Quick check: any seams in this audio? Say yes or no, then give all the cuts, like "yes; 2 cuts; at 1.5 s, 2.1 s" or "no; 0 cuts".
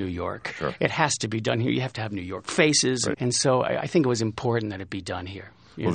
yes; 1 cut; at 3.1 s